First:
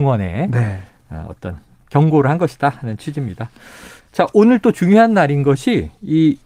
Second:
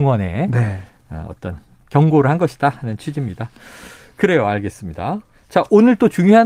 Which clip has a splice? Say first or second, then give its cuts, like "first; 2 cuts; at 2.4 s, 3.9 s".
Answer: first; 1 cut; at 4.0 s